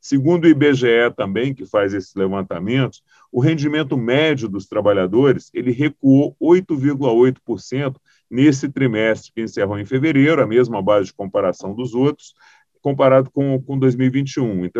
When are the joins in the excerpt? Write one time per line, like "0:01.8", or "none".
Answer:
0:12.8